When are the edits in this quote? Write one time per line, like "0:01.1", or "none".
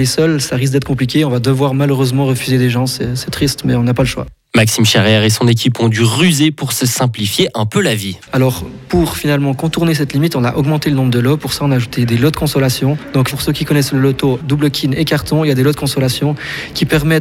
0:08.3
0:13.3
0:14.4